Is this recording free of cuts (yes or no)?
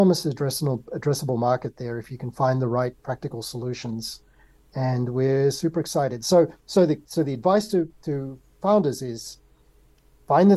yes